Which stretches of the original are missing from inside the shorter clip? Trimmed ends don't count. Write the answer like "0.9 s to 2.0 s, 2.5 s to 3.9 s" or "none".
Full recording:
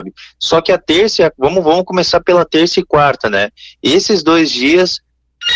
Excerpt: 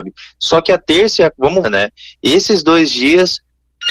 1.6 s to 3.2 s